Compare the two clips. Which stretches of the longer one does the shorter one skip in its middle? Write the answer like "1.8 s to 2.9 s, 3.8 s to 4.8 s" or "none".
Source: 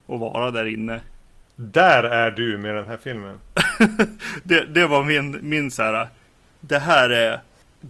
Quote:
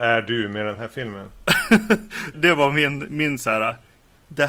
4.4 s to 4.7 s